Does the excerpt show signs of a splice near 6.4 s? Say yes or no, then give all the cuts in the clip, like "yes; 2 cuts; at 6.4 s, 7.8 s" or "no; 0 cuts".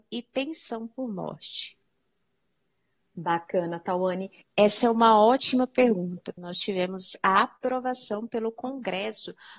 yes; 2 cuts; at 4.4 s, 6.4 s